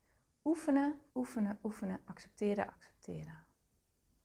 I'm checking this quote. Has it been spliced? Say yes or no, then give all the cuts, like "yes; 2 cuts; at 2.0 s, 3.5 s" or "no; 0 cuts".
yes; 2 cuts; at 1.1 s, 2.7 s